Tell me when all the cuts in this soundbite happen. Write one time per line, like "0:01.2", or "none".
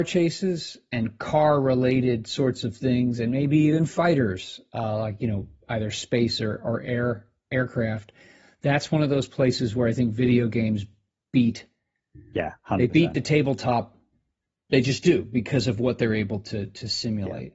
none